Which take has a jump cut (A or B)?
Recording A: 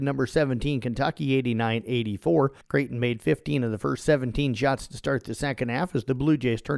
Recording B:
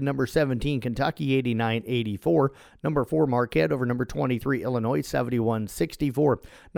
A